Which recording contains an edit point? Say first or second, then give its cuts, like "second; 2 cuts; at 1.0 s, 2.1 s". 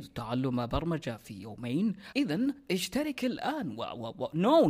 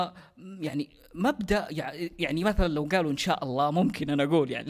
first; 1 cut; at 2.1 s